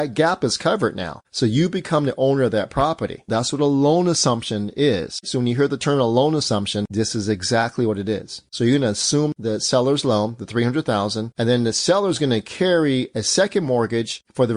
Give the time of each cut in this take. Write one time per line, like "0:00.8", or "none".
0:03.3
0:11.3